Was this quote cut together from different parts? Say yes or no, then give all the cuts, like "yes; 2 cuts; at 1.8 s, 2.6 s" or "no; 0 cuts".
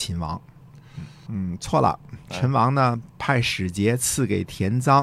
yes; 1 cut; at 1.3 s